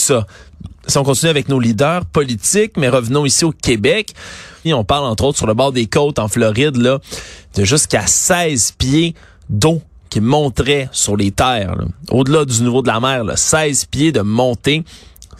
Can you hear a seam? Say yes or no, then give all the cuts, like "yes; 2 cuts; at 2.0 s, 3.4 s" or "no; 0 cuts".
yes; 1 cut; at 4.6 s